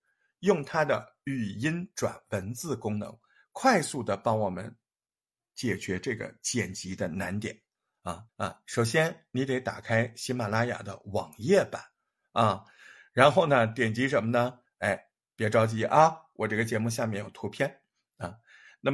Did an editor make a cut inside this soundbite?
yes; 2 cuts; at 8.3 s, 14.7 s

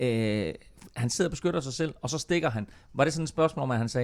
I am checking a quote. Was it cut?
no; 0 cuts

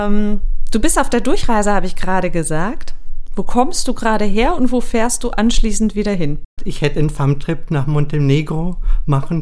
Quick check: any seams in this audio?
yes; 1 cut; at 6.6 s

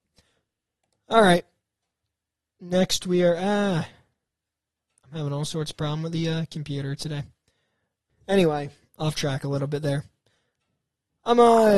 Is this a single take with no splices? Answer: no; 1 cut; at 8.1 s

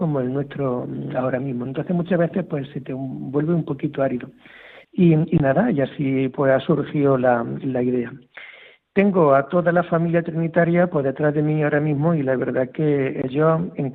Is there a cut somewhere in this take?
yes; 1 cut; at 4.8 s

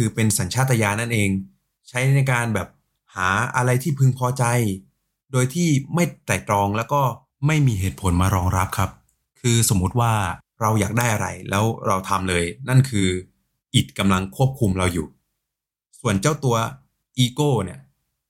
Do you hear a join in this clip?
no; 0 cuts

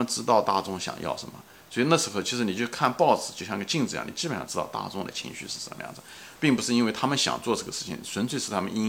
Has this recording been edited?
yes; 1 cut; at 6.3 s

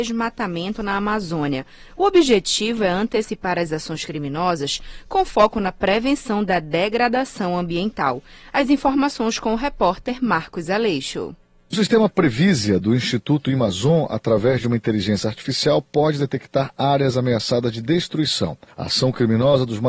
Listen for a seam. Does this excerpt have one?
no; 0 cuts

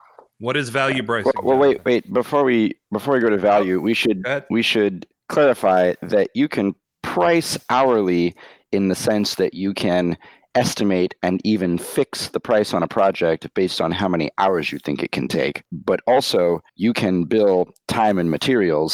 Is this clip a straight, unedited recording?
no; 1 cut; at 16.7 s

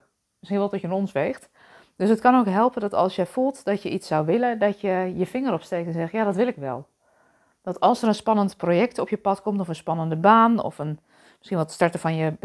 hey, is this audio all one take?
yes; 0 cuts

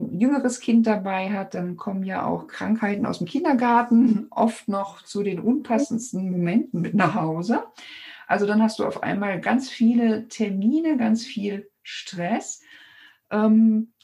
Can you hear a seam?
no; 0 cuts

